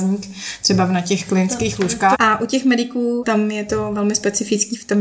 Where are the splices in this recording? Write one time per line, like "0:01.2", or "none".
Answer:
0:02.1
0:03.2